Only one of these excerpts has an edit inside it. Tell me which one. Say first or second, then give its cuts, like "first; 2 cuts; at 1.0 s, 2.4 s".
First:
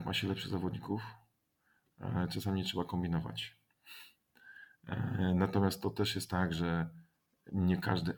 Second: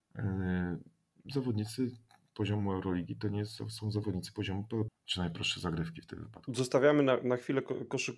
second; 1 cut; at 4.9 s